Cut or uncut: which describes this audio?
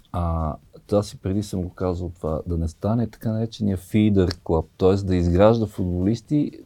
uncut